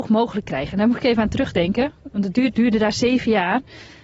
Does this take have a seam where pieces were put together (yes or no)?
yes